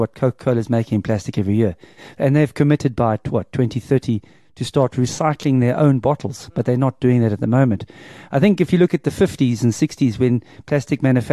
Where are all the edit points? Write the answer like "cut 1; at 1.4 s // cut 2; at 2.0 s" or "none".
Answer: none